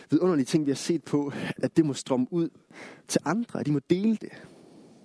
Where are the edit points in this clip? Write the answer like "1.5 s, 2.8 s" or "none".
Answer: 1.6 s